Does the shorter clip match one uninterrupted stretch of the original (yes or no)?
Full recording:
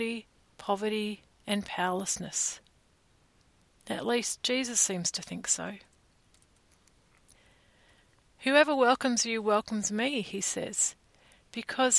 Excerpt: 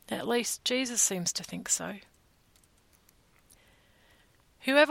yes